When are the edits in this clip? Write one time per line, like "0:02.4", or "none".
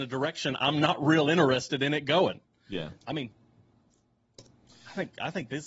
0:03.0